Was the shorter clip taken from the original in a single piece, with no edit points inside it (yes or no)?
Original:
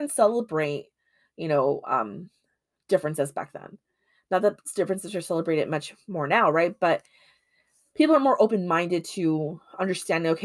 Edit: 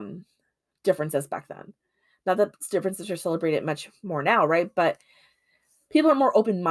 yes